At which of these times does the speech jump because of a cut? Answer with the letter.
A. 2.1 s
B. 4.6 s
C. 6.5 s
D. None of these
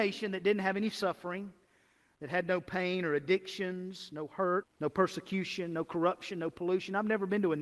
B